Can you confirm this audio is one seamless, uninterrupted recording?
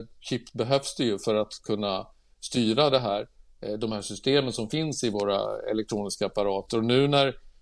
yes; 0 cuts

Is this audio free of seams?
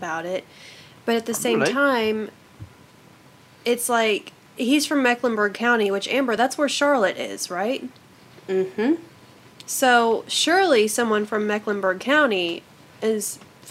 yes; 0 cuts

